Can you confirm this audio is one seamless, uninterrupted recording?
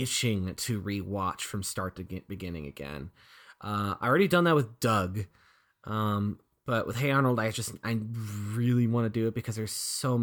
yes; 0 cuts

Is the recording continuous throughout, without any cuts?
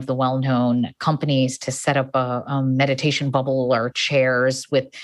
yes; 0 cuts

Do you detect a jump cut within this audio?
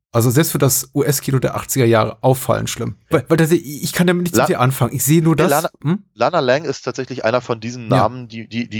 yes; 1 cut; at 3.1 s

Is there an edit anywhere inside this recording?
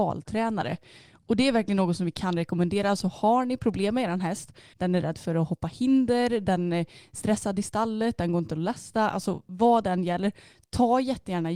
yes; 1 cut; at 4.7 s

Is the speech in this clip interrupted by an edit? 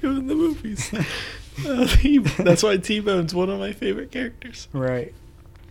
no; 0 cuts

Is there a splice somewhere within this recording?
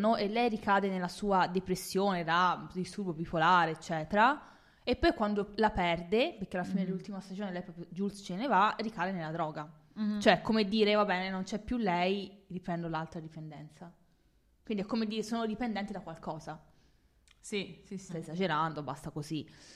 yes; 1 cut; at 18.1 s

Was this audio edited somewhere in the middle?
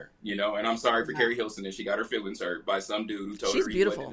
no; 0 cuts

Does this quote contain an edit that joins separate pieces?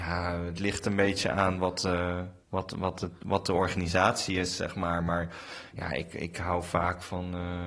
yes; 1 cut; at 2.4 s

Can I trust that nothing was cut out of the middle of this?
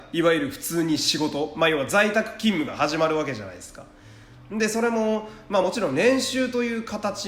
yes; 0 cuts

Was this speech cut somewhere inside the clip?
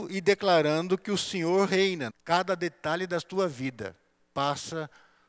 yes; 1 cut; at 2.1 s

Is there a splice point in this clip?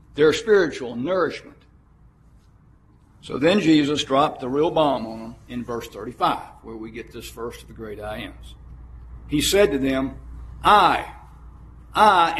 no; 0 cuts

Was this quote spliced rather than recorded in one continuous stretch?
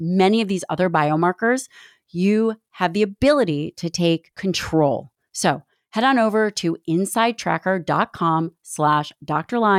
no; 0 cuts

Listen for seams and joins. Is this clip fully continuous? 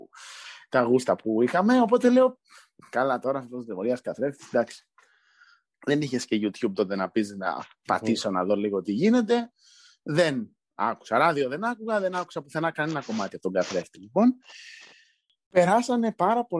no; 1 cut; at 5.7 s

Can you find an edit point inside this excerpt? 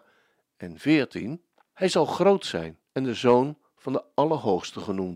yes; 2 cuts; at 1.7 s, 2.9 s

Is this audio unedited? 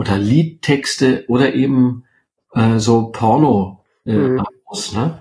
yes; 0 cuts

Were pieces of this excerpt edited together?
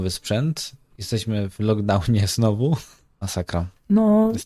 yes; 1 cut; at 3.2 s

